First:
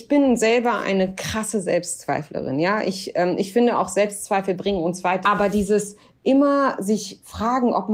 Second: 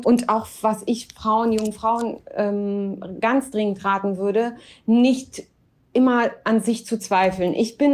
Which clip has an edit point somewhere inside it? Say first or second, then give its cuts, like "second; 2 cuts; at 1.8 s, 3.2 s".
first; 1 cut; at 5.2 s